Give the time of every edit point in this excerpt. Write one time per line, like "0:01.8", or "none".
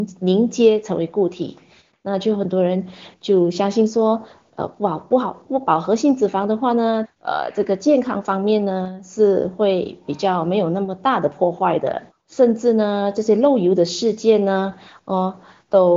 0:07.0
0:12.1